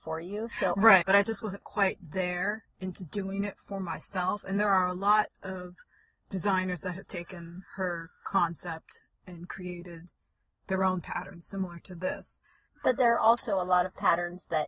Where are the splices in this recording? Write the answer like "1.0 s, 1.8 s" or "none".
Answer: 1.0 s